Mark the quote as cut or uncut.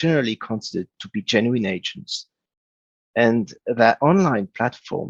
uncut